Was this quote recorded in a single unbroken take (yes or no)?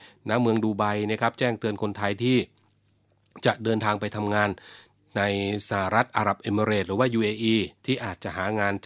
no